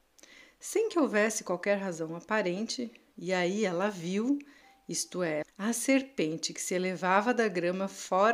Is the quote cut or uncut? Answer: cut